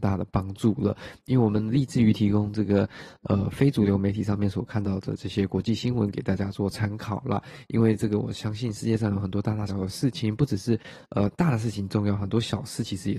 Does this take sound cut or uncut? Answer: cut